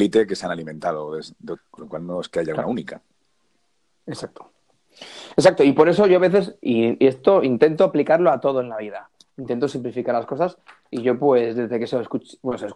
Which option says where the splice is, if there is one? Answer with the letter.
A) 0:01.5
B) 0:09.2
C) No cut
A